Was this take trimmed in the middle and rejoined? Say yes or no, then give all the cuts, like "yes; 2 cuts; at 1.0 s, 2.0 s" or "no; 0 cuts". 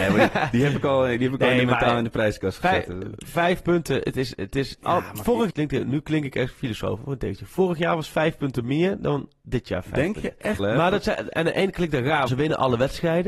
yes; 3 cuts; at 5.5 s, 10.6 s, 12.3 s